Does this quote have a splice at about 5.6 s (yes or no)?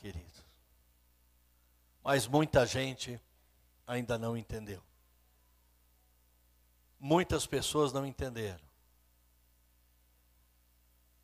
no